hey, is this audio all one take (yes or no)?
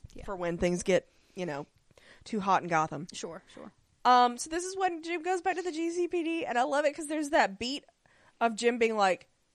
yes